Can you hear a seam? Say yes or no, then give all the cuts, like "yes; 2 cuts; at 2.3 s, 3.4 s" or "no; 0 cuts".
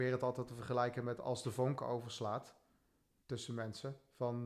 no; 0 cuts